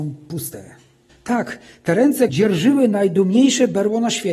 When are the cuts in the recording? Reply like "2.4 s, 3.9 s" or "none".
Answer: 1.1 s, 2.3 s